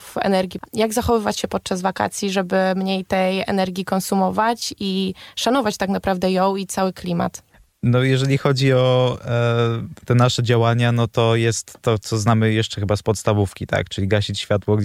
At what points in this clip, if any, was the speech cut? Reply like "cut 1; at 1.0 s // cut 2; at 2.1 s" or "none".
none